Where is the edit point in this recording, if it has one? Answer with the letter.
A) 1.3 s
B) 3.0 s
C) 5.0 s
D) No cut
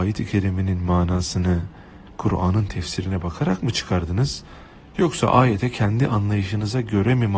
D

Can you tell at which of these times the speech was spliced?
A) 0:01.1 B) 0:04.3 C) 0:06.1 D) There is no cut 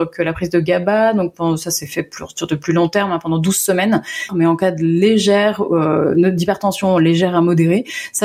B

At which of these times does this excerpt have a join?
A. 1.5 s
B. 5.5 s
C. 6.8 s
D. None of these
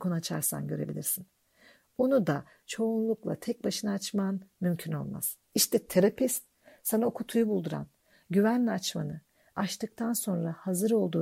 B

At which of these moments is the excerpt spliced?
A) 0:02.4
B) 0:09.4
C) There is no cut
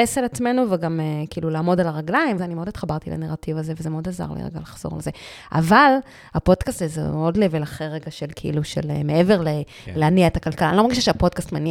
A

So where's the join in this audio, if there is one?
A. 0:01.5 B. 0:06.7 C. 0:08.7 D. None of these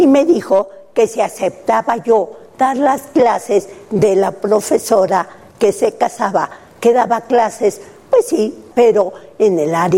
C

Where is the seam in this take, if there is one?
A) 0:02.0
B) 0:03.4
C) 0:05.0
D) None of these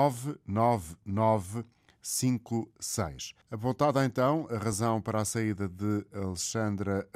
B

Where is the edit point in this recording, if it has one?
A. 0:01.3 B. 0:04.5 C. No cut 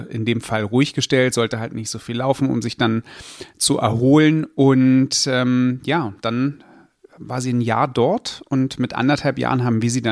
C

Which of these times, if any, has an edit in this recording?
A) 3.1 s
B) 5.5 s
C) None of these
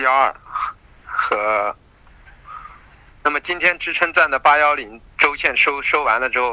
A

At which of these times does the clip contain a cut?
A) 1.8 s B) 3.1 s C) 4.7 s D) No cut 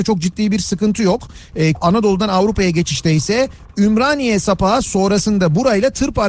A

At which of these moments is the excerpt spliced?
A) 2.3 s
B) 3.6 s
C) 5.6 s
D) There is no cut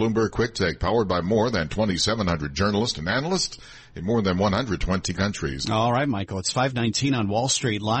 C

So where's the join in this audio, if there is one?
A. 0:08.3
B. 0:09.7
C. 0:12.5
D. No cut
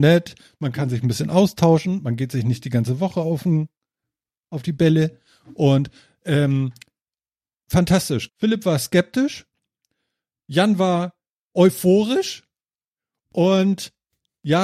A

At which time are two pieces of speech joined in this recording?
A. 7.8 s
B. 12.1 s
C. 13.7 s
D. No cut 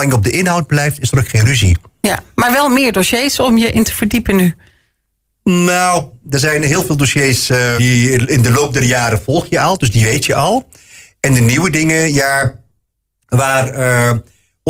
A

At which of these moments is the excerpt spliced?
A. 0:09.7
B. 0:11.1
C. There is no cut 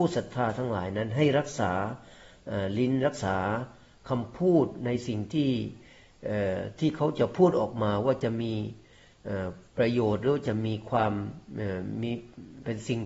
A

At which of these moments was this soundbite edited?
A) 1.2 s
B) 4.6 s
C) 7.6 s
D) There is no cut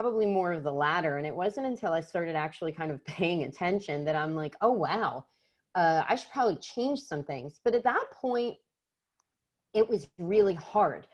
D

